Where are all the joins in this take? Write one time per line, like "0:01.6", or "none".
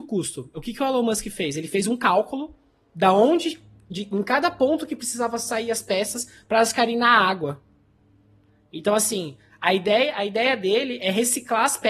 none